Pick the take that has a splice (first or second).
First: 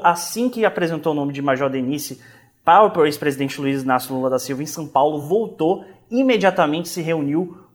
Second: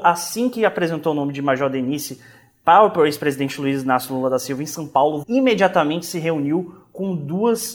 second